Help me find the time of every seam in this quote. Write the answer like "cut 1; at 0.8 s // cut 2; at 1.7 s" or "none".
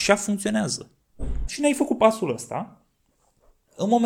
cut 1; at 1.5 s